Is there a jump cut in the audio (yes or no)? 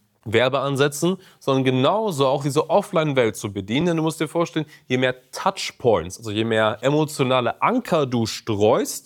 no